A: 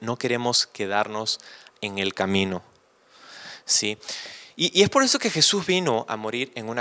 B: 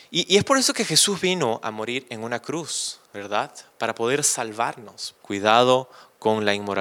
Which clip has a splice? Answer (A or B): B